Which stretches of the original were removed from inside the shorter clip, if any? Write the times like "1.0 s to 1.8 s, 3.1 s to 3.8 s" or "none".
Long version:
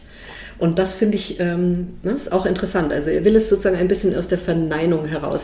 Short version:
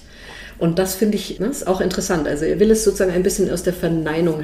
1.4 s to 2.0 s